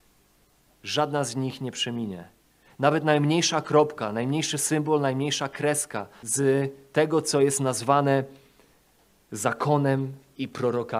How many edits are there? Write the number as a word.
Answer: one